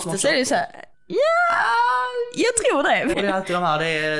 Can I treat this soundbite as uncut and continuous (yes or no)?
no